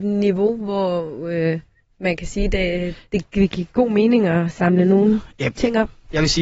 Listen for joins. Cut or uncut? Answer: uncut